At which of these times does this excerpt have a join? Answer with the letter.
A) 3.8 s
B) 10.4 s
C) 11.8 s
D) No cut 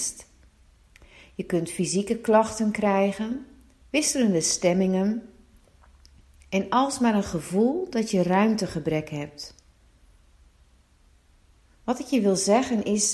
A